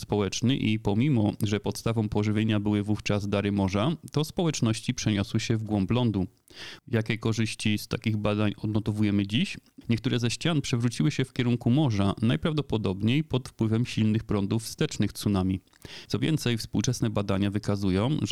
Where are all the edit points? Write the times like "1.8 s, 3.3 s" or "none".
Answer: 6.8 s, 9.8 s, 16.1 s